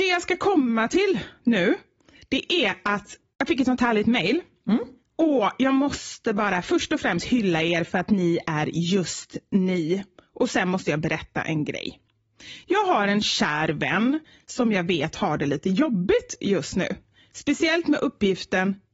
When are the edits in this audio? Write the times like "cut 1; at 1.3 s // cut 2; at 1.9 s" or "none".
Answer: none